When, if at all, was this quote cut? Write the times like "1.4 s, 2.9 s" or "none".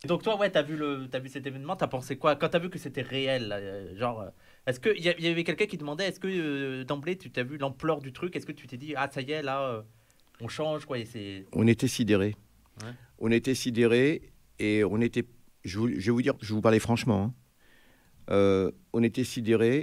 1.1 s